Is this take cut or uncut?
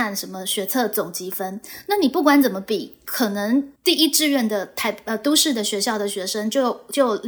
cut